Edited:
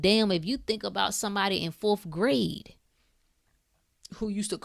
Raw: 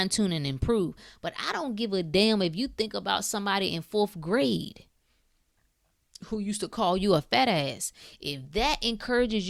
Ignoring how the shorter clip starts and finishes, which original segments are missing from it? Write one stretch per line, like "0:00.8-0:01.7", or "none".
none